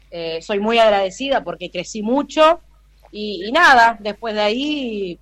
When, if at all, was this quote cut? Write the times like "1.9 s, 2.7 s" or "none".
1.4 s